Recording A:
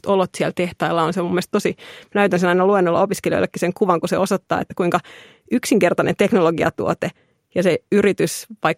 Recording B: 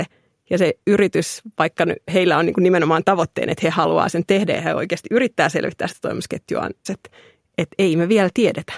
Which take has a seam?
B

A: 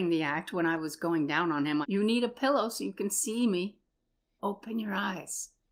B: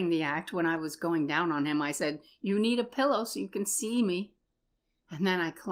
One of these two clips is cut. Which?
A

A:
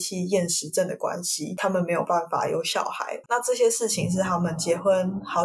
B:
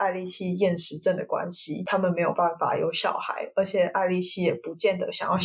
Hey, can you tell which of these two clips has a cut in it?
A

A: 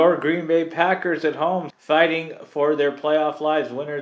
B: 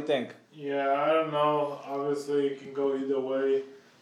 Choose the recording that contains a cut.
A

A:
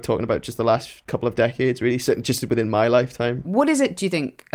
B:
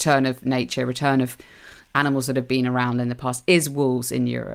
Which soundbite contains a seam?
A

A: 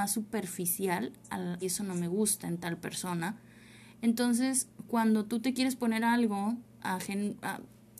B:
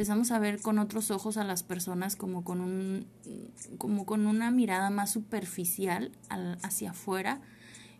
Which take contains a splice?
A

